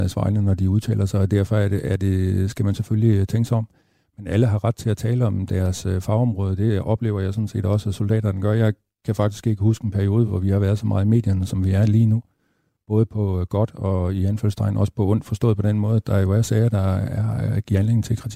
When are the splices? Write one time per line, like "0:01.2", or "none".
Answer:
none